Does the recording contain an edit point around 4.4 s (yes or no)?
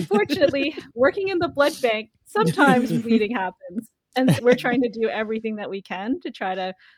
yes